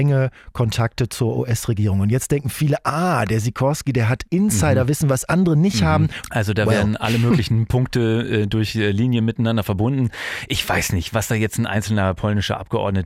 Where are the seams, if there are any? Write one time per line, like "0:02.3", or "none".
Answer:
0:06.2